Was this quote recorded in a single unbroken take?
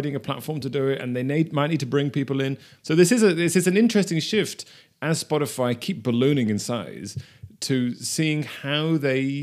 no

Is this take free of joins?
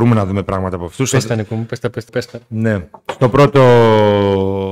no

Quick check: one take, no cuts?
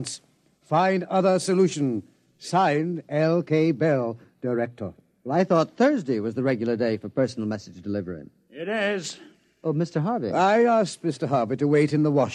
yes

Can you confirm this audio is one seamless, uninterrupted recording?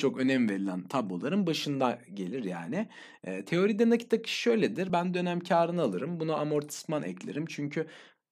yes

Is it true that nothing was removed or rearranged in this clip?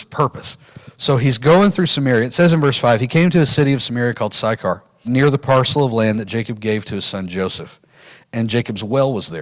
no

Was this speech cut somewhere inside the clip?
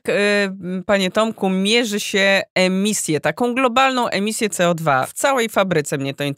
no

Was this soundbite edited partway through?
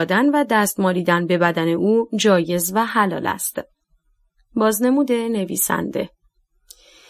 no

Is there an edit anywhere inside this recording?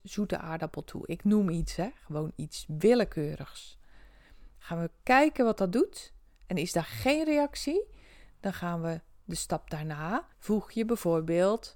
yes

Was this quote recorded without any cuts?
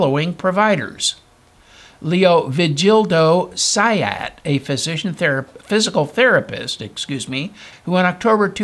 no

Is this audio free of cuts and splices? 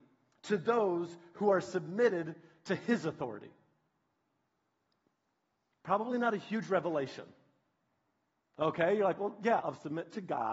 no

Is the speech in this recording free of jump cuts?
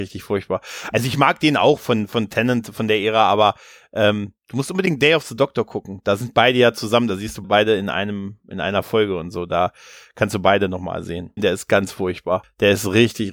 no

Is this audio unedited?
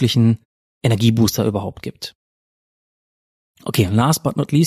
yes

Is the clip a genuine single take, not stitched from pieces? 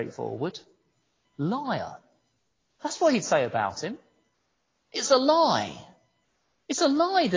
yes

